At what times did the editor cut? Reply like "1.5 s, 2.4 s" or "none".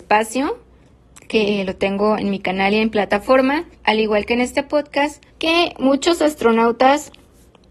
3.7 s, 5.3 s